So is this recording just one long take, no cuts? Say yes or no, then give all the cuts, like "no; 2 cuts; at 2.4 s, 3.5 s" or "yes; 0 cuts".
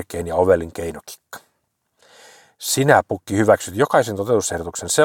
yes; 0 cuts